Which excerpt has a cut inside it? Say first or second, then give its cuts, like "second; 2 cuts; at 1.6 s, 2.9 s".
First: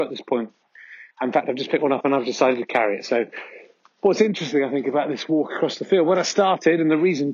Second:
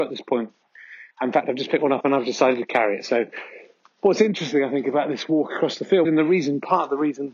second; 1 cut; at 6.0 s